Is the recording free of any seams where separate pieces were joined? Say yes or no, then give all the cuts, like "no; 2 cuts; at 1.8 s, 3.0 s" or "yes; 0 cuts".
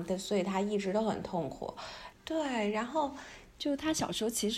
no; 2 cuts; at 2.1 s, 3.5 s